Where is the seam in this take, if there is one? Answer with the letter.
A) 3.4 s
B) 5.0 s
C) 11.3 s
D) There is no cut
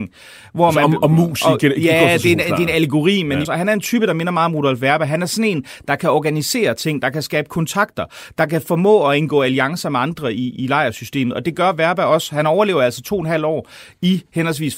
A